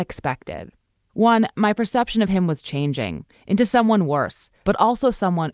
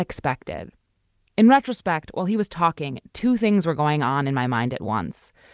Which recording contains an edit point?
first; 2 cuts; at 1.1 s, 4.6 s

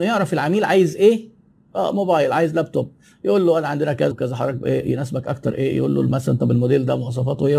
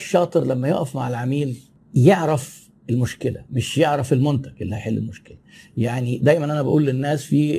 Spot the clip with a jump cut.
first; 1 cut; at 4.1 s

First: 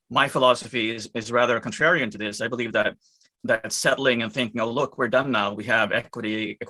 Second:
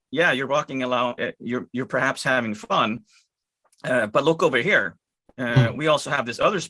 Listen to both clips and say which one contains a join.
second; 1 cut; at 1.2 s

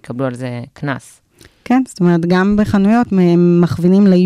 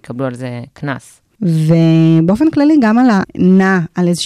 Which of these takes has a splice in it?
second; 2 cuts; at 1.4 s, 3.2 s

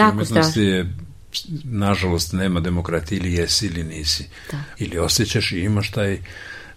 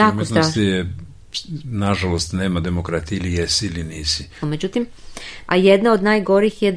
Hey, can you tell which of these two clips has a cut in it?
second; 2 cuts; at 4.4 s, 5.5 s

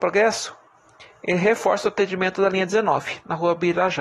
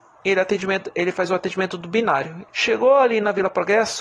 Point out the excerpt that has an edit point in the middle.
second; 1 cut; at 2.5 s

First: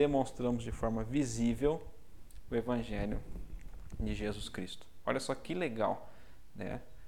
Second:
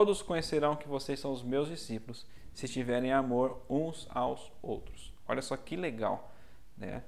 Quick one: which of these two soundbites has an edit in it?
first; 1 cut; at 5.0 s

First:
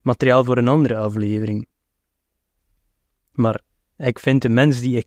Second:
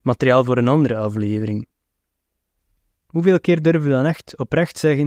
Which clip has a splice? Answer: second; 1 cut; at 2.9 s

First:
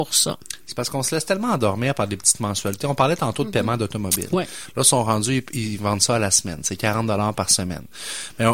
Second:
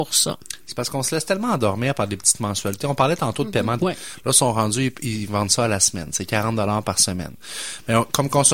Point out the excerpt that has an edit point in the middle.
second; 1 cut; at 3.8 s

